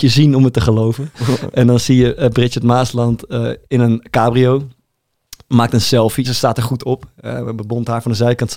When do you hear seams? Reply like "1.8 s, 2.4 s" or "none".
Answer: 3.6 s, 6.2 s